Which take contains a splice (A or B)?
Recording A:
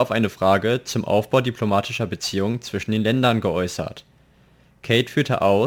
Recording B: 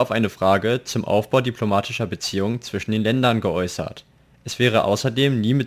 B